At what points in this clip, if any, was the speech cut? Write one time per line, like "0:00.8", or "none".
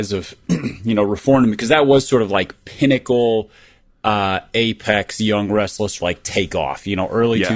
0:06.0